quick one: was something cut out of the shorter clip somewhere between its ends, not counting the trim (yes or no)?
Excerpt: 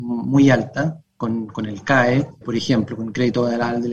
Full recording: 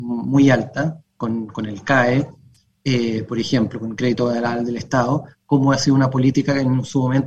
yes